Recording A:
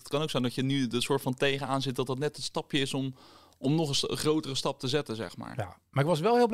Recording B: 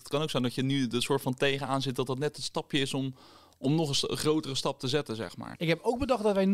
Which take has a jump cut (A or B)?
B